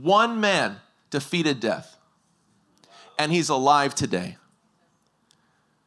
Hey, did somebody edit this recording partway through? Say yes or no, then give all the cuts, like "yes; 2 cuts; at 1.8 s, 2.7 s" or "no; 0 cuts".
no; 0 cuts